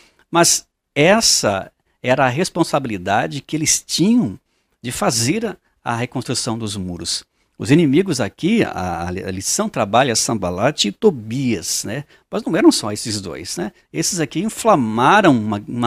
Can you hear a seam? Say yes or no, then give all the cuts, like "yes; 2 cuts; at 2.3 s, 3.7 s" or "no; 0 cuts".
no; 0 cuts